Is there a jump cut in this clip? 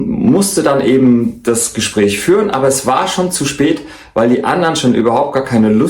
no; 0 cuts

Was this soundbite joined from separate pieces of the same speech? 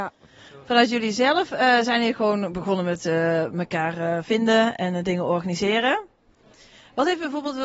no; 0 cuts

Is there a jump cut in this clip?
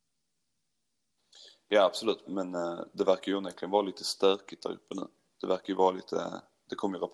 yes; 1 cut; at 2.2 s

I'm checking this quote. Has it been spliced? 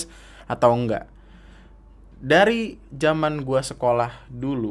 no; 0 cuts

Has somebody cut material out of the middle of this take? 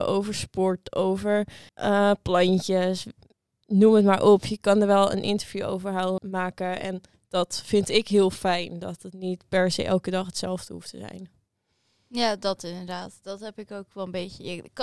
yes; 2 cuts; at 1.7 s, 6.2 s

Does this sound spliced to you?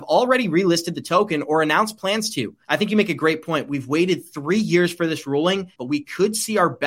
yes; 2 cuts; at 2.6 s, 5.8 s

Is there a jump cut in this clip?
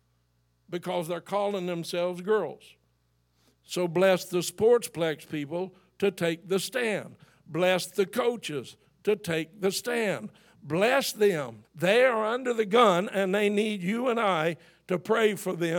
yes; 1 cut; at 11.6 s

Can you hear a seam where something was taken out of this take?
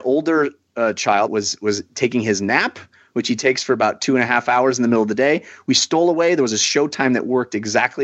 yes; 1 cut; at 1.3 s

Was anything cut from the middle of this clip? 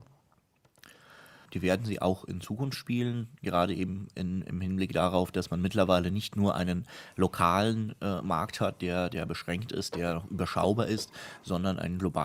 yes; 1 cut; at 1.5 s

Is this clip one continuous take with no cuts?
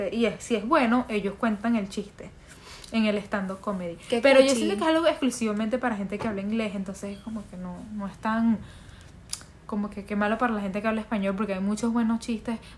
yes; 0 cuts

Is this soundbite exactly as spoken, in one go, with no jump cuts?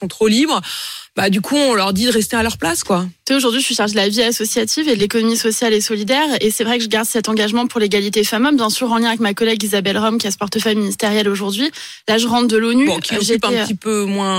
yes; 0 cuts

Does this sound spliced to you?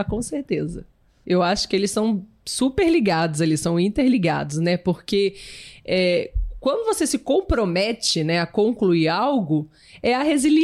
yes; 1 cut; at 1.2 s

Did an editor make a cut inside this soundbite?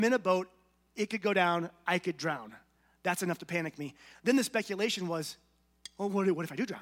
no; 0 cuts

